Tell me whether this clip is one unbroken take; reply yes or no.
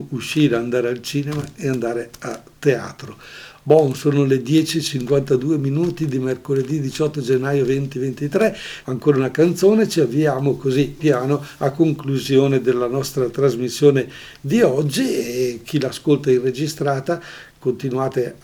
no